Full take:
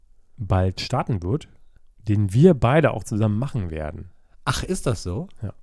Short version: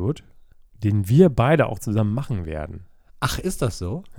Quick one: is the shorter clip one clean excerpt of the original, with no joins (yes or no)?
yes